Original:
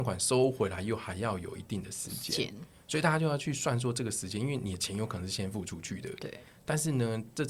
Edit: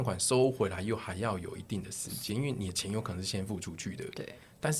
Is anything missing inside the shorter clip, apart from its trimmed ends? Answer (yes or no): yes